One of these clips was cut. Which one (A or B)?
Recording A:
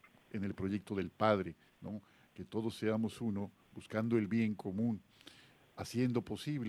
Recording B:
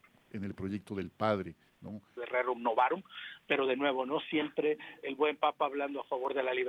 B